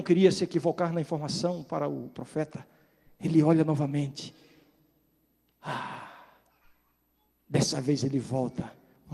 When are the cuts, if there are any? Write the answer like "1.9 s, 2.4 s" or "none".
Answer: none